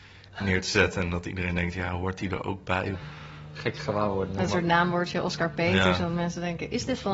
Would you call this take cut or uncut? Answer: cut